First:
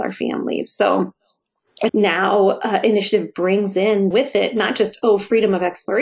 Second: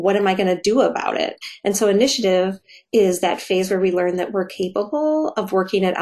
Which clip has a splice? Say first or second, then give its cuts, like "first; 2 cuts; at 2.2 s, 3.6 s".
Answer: first; 2 cuts; at 1.9 s, 4.1 s